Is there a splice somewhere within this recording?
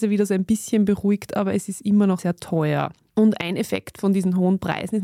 yes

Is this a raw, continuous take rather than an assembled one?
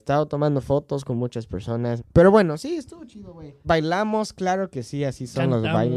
no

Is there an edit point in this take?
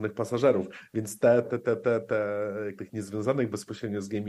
yes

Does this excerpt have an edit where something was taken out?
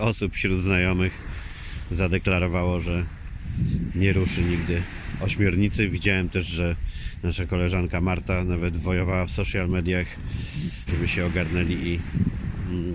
yes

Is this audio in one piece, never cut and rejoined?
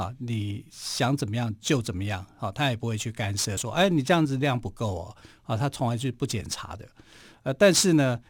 yes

